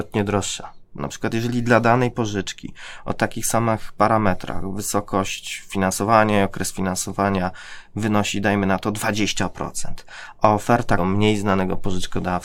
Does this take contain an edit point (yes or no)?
yes